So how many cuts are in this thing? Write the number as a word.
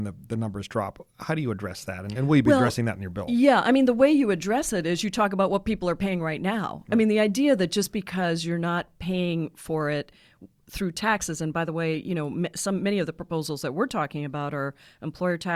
zero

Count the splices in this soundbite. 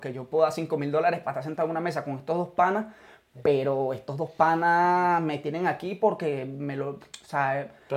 zero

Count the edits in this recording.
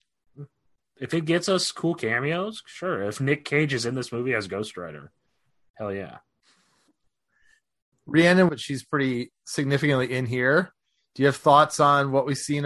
one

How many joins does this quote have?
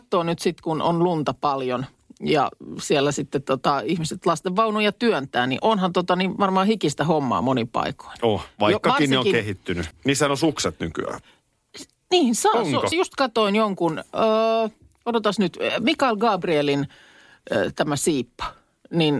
three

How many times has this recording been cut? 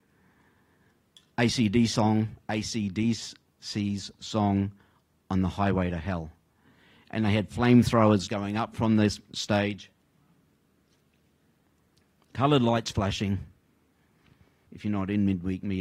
one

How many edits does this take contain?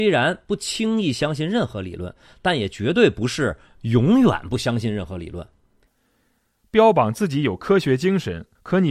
one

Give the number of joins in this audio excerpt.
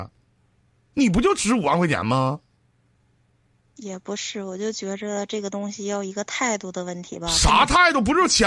zero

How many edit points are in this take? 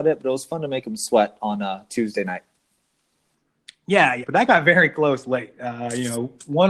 one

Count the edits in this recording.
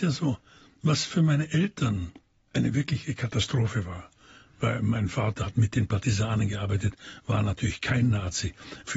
zero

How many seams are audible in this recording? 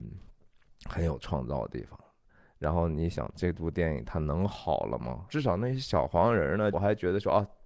two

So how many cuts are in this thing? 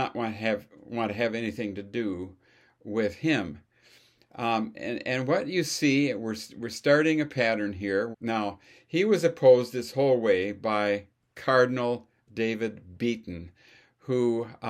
one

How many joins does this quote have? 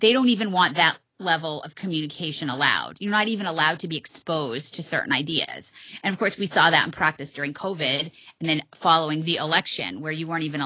zero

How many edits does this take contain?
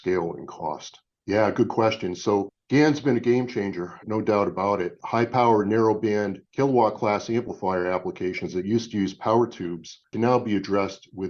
two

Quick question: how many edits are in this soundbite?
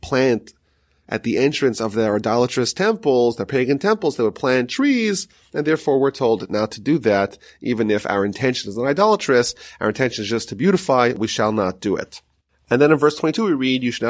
zero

